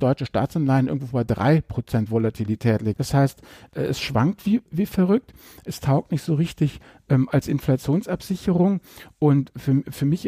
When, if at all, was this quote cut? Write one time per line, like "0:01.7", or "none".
0:02.9

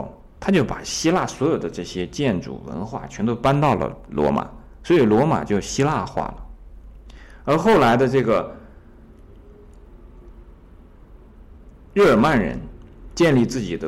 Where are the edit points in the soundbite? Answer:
none

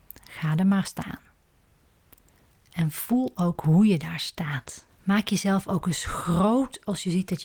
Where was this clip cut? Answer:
0:02.5
0:04.9

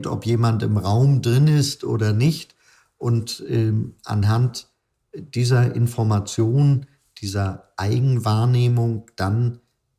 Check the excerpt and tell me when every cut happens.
none

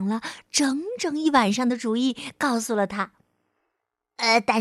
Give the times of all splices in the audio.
none

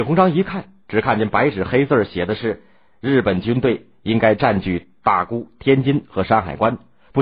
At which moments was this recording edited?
none

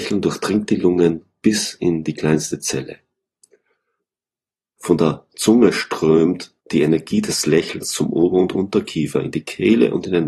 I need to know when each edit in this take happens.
0:04.8
0:06.6

